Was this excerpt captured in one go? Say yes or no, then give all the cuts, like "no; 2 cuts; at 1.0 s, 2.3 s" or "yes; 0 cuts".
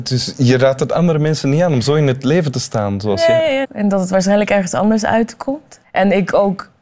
no; 2 cuts; at 3.6 s, 5.8 s